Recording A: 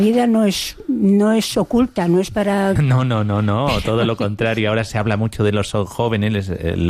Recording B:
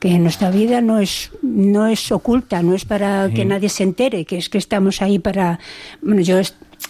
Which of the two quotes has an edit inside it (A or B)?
A